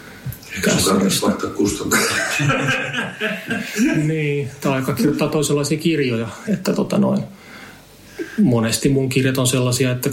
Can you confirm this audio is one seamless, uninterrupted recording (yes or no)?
no